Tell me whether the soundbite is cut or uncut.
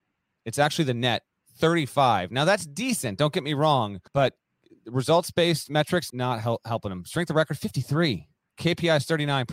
cut